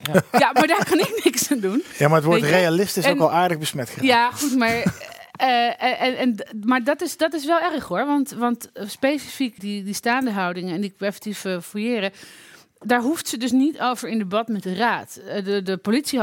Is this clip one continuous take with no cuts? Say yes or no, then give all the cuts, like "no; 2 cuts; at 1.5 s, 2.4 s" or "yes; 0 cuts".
no; 1 cut; at 9.6 s